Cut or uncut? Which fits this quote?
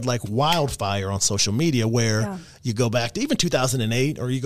uncut